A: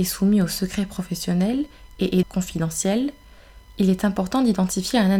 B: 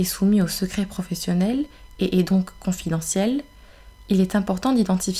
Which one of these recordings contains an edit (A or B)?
A